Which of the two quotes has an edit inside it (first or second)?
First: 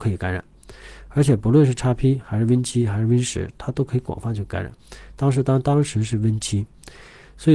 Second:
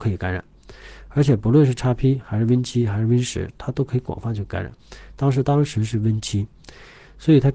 second